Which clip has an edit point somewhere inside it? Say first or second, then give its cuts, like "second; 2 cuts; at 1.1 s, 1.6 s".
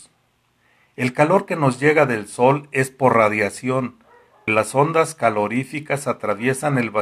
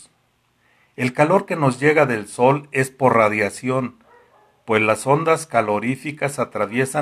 first; 1 cut; at 4.5 s